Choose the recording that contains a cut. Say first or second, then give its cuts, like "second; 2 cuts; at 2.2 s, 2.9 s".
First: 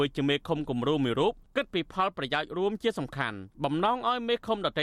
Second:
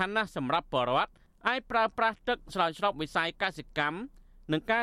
first; 1 cut; at 3.5 s